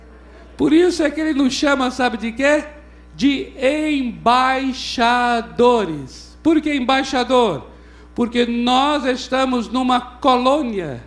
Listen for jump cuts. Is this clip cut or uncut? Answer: uncut